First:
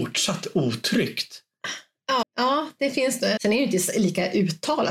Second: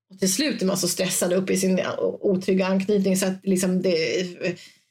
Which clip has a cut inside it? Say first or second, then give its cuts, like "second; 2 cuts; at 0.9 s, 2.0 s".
first; 2 cuts; at 2.2 s, 3.4 s